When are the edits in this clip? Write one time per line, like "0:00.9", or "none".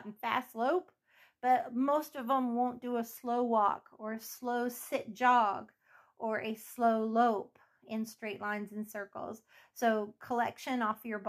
none